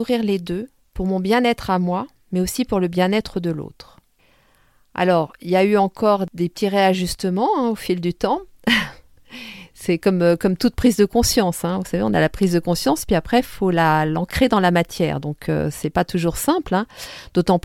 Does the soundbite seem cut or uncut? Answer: uncut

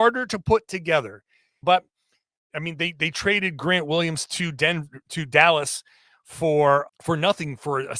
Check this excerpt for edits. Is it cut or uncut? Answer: cut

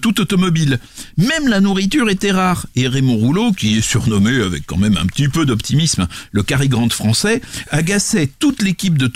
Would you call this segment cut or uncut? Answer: uncut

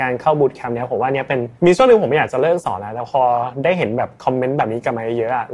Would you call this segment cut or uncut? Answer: cut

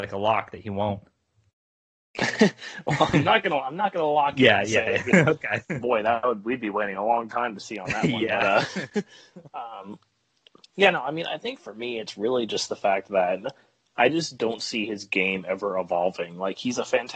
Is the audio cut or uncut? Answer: uncut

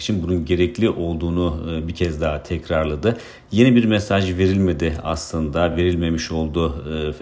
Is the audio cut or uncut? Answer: uncut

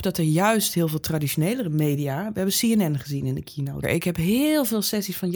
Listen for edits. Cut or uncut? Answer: cut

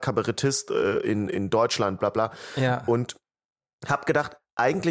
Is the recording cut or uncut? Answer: cut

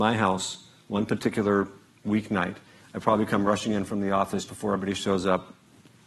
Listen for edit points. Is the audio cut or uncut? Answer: cut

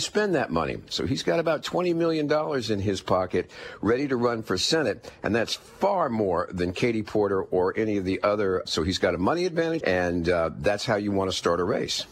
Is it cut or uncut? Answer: cut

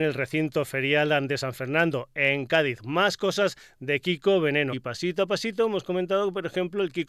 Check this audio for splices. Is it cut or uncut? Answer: cut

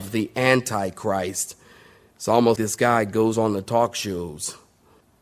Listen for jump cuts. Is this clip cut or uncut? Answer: cut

